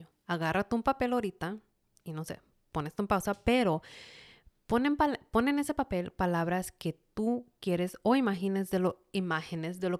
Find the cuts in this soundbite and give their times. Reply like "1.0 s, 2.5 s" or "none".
none